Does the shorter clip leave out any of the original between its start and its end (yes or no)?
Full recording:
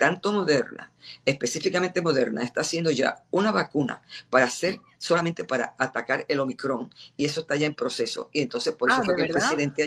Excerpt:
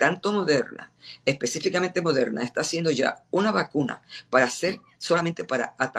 no